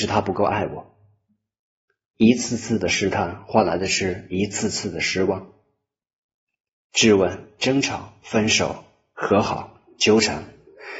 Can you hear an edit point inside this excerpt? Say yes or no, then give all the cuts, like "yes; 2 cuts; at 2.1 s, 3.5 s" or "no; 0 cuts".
yes; 1 cut; at 7.6 s